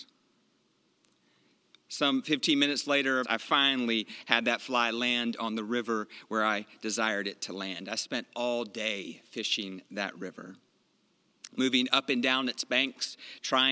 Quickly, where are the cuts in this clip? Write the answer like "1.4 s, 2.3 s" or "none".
3.2 s